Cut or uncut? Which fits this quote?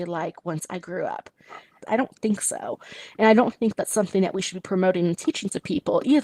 cut